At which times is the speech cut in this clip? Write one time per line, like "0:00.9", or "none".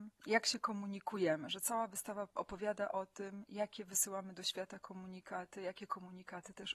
none